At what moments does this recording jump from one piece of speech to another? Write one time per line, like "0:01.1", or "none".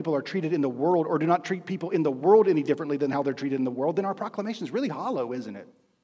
none